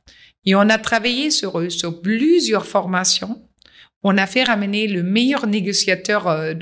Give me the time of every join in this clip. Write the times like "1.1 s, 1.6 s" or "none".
none

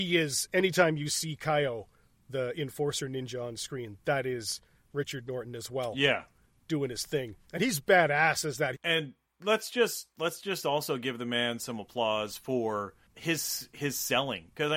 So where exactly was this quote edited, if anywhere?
6.6 s, 8.7 s

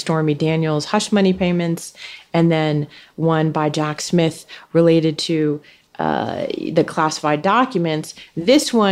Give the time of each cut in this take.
none

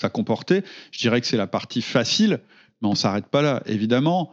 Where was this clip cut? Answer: none

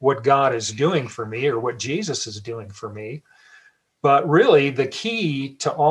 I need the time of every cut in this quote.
none

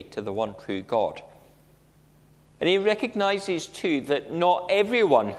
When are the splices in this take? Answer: 2.6 s

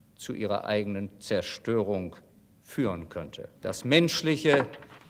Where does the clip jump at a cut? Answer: 3.6 s

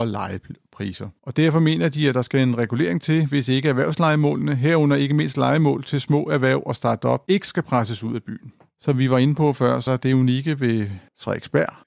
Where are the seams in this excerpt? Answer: 1.2 s, 9.9 s

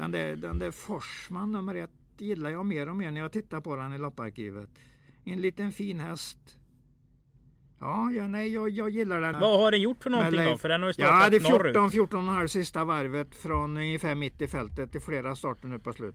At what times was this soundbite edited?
9.3 s

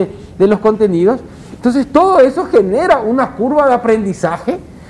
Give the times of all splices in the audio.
1.6 s

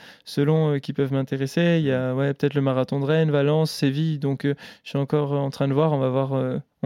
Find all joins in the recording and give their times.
none

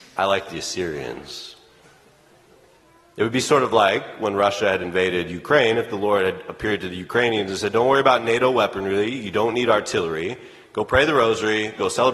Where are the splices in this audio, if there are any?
none

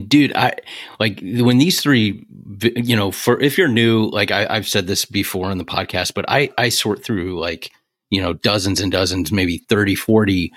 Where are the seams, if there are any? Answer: none

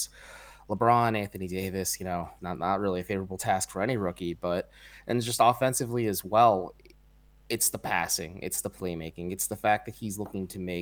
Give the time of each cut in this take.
2.4 s

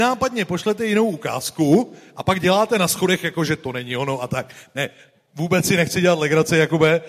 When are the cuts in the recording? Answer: none

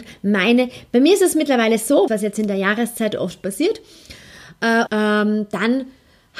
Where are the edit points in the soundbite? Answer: 2.1 s, 4.9 s

